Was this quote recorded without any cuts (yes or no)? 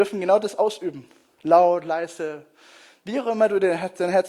yes